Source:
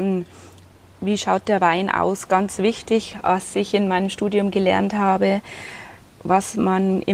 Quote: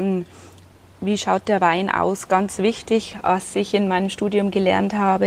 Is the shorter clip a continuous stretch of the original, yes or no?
yes